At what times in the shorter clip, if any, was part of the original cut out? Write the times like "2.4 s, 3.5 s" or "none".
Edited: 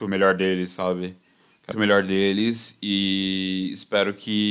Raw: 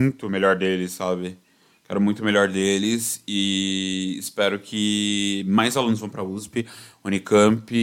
1.7 s